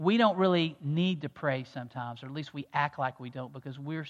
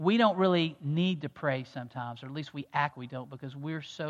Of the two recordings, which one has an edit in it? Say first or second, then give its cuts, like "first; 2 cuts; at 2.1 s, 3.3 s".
second; 1 cut; at 2.9 s